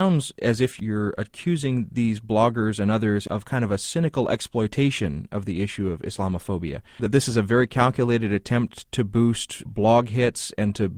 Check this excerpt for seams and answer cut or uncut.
cut